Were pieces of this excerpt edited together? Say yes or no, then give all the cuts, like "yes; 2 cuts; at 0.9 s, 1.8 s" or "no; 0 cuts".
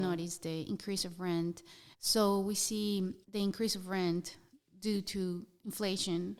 yes; 2 cuts; at 1.9 s, 3.2 s